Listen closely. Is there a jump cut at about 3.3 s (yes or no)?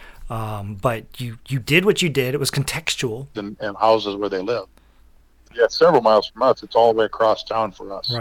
yes